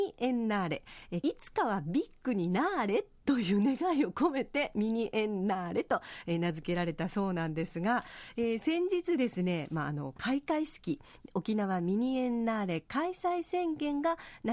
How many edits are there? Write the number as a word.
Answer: one